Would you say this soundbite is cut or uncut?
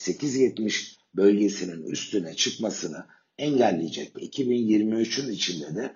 cut